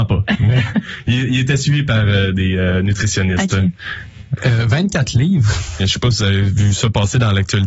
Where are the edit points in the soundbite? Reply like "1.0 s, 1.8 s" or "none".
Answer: 4.4 s, 5.8 s